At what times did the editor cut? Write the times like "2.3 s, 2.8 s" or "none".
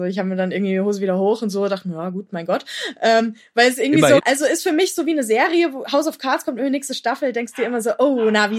4.2 s